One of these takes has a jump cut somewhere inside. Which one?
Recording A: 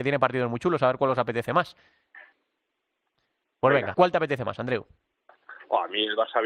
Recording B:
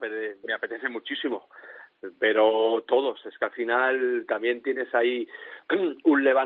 A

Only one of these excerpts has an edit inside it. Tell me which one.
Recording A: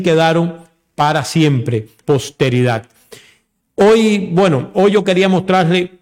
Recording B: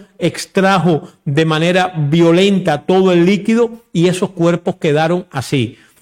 A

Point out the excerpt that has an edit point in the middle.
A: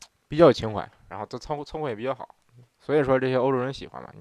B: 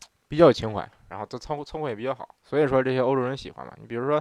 B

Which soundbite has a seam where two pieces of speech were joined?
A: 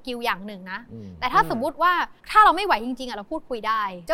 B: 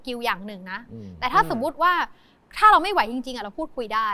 A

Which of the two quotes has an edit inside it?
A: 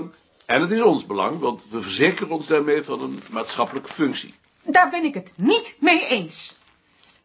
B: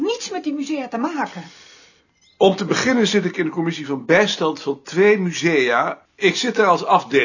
B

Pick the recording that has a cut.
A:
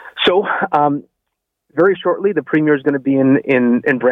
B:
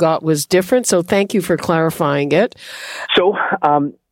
B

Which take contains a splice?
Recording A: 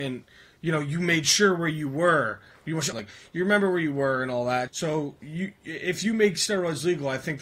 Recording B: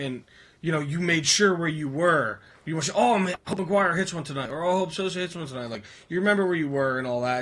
A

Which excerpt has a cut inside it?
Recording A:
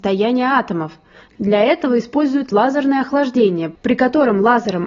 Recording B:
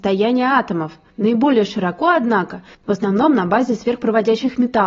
B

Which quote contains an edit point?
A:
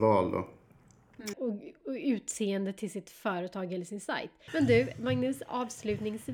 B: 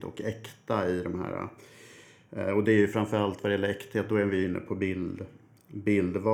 A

